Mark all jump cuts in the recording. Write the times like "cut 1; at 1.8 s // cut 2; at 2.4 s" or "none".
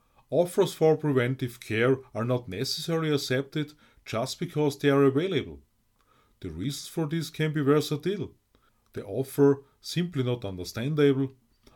none